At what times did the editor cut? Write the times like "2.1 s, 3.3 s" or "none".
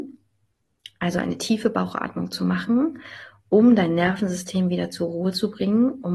none